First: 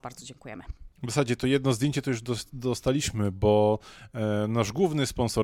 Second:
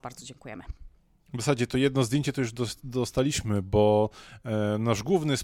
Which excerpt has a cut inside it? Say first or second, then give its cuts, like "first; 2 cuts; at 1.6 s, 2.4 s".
first; 1 cut; at 0.9 s